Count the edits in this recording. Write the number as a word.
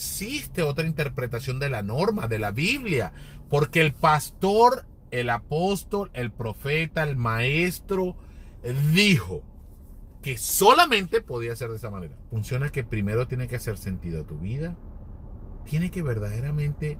one